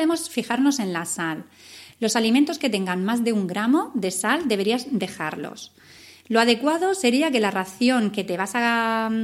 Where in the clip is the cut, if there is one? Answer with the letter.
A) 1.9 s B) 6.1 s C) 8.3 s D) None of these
A